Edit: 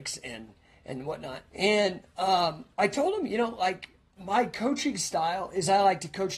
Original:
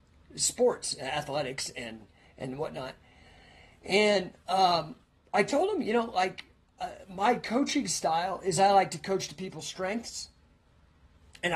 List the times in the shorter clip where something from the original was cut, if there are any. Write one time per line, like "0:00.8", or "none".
0:01.5
0:02.7
0:04.2